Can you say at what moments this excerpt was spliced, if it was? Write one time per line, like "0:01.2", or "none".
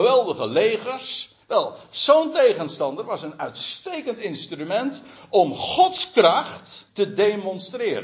0:01.4
0:06.9

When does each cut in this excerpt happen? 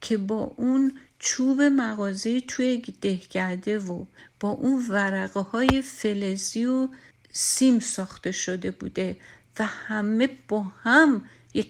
none

